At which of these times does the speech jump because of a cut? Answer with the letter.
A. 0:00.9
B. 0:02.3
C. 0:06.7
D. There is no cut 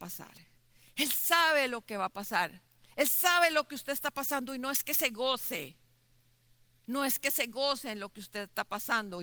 D